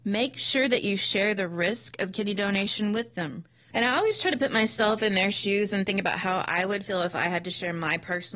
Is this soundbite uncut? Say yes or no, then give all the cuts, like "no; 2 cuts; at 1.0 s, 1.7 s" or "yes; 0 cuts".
no; 1 cut; at 3.7 s